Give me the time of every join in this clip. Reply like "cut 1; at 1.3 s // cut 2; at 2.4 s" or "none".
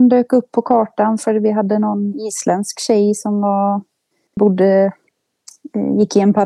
cut 1; at 4.4 s

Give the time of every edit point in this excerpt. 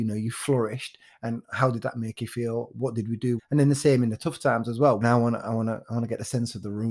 cut 1; at 3.4 s // cut 2; at 5.0 s

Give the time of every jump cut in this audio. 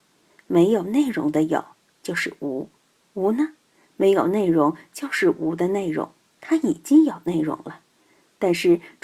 none

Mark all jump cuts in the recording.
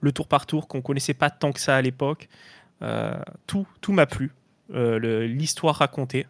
none

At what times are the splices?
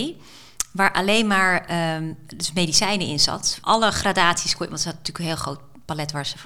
none

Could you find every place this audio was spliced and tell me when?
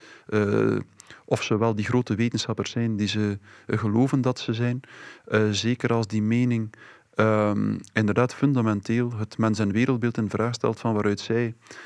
none

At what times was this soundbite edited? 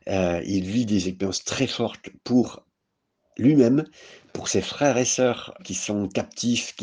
cut 1; at 5.6 s

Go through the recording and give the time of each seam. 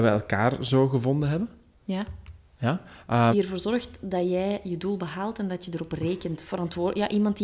cut 1; at 3.3 s

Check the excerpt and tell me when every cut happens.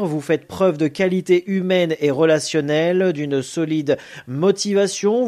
none

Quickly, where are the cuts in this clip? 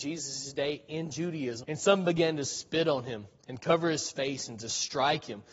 cut 1; at 1.6 s

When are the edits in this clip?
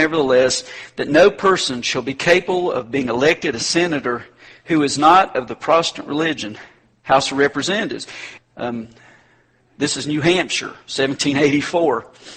cut 1; at 8.4 s

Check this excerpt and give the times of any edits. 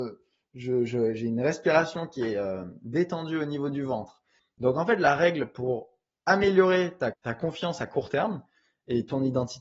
cut 1; at 4.4 s // cut 2; at 7.1 s

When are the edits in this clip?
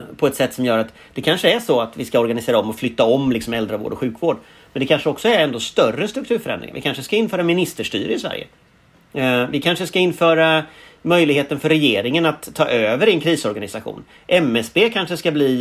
none

